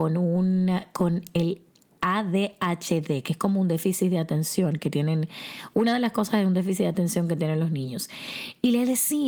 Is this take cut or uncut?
uncut